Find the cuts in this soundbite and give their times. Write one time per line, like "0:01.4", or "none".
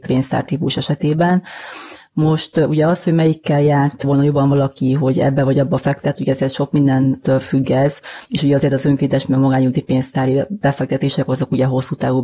0:08.2

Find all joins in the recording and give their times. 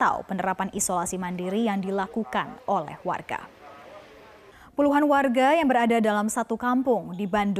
none

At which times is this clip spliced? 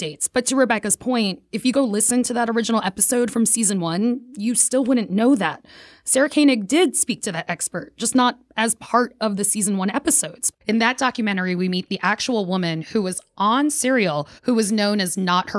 0:10.5
0:14.4

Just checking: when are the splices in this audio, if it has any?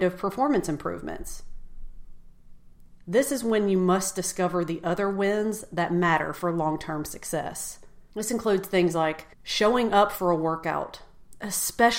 0:08.1
0:09.3

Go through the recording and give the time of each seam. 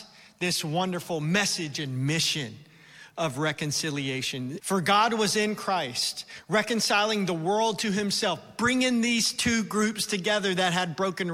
0:04.6

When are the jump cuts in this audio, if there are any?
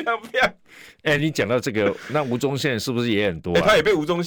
none

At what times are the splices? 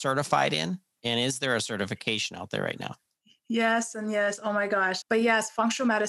0:03.9
0:05.0

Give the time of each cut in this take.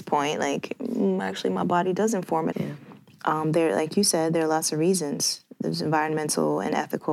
0:02.5

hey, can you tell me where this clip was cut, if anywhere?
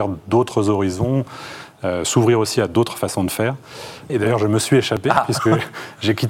0:04.1

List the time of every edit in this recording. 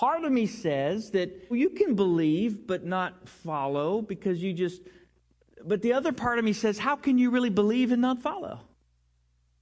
0:01.5

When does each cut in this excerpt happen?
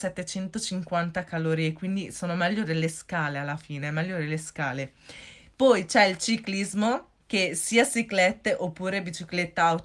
0:07.2

